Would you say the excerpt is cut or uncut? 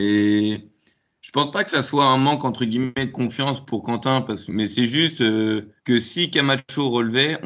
cut